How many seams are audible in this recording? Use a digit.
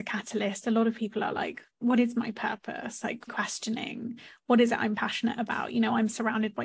2